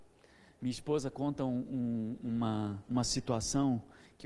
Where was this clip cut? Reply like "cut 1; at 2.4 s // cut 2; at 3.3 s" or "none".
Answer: none

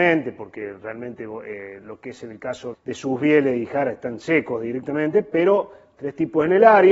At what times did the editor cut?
cut 1; at 2.7 s

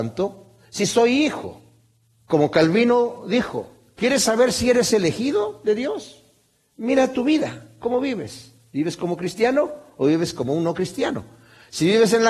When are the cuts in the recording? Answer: none

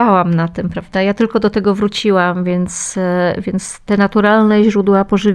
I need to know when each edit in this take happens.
none

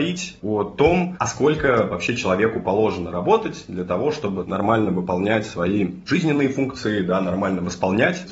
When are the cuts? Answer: none

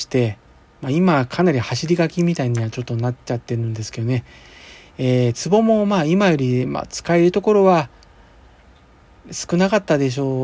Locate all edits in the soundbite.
none

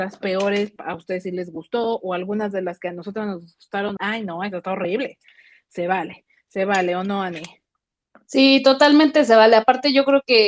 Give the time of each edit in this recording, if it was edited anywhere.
cut 1; at 4.0 s

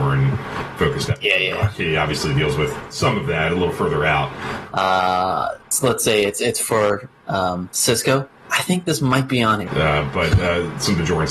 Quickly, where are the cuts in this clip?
cut 1; at 4.7 s // cut 2; at 9.7 s

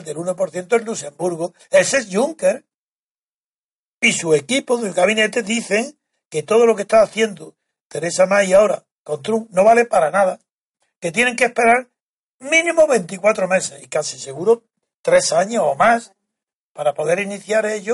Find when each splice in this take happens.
none

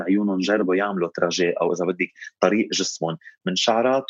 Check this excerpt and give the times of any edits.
none

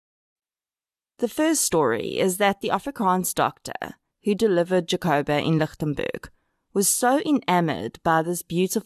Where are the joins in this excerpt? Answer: none

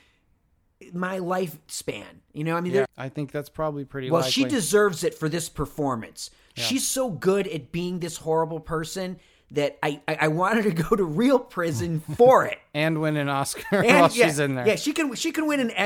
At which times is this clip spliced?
cut 1; at 2.9 s

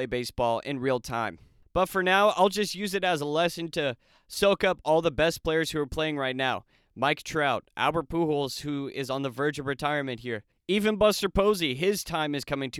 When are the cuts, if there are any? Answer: none

